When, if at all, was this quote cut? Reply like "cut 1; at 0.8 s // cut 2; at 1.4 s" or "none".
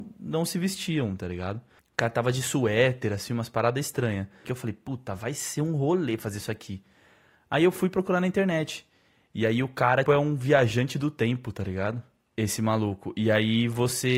cut 1; at 4.4 s // cut 2; at 10.1 s